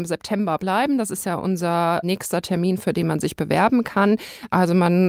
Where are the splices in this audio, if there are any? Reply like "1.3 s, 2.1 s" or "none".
none